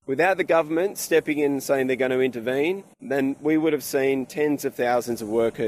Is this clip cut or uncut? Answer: uncut